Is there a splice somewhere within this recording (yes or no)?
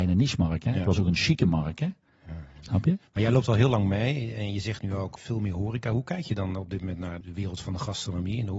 yes